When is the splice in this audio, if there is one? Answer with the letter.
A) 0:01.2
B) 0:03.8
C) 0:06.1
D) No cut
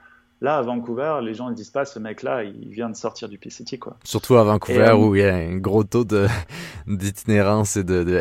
D